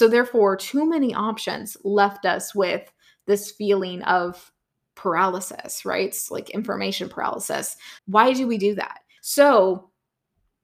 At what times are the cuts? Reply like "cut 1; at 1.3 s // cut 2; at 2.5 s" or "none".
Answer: cut 1; at 8.0 s // cut 2; at 9.2 s